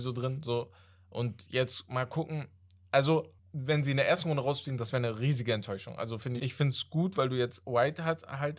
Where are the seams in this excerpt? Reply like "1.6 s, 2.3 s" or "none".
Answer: 3.4 s, 6.4 s